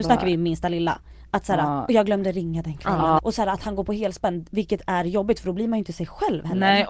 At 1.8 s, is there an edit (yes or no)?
no